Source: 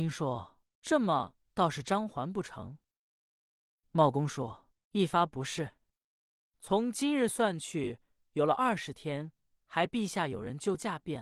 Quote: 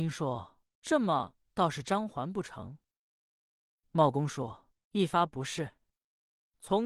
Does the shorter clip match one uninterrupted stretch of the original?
yes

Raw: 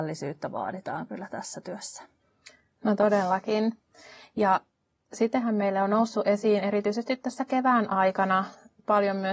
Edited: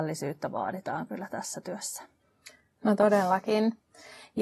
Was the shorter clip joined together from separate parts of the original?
no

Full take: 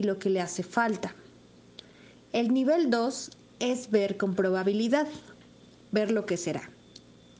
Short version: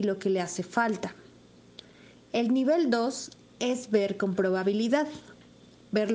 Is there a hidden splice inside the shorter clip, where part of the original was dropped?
no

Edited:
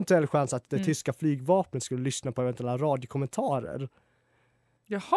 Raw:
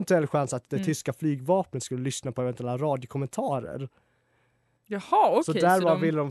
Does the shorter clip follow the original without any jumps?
yes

